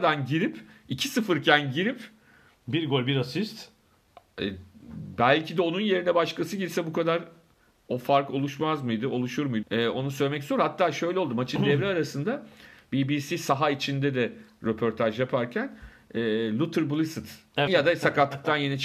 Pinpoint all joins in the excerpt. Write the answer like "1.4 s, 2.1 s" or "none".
9.6 s, 17.7 s